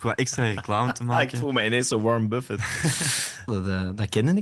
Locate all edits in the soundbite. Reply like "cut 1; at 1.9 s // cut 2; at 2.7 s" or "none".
cut 1; at 3.5 s